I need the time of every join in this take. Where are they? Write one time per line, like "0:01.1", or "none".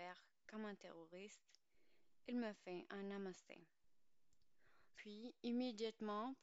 0:04.9